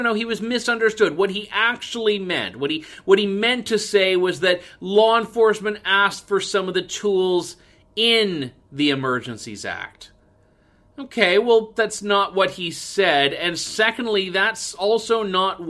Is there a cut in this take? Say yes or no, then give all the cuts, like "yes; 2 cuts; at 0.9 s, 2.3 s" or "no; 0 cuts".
yes; 1 cut; at 11.8 s